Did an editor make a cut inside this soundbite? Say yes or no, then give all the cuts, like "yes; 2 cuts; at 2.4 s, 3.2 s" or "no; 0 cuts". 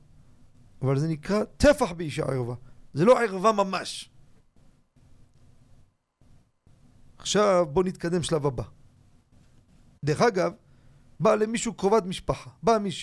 yes; 1 cut; at 10.0 s